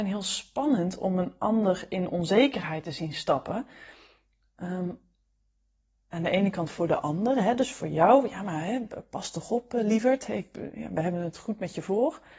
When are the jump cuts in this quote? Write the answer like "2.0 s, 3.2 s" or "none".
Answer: none